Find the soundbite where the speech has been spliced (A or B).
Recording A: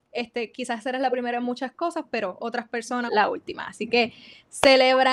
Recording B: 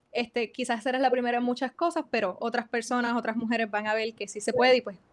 A